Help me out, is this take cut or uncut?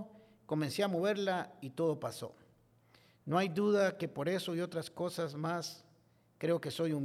uncut